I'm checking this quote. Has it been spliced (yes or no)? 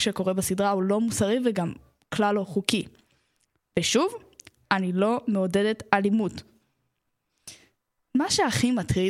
no